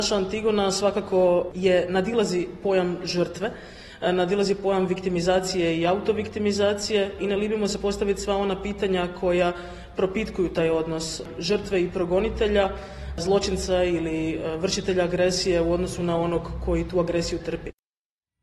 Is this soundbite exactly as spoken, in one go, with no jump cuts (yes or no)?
yes